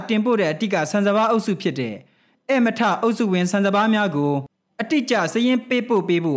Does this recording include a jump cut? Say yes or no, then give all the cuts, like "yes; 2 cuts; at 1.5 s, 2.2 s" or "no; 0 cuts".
no; 0 cuts